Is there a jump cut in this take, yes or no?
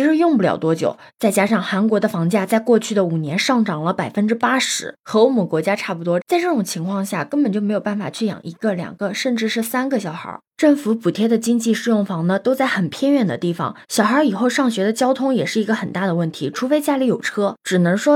yes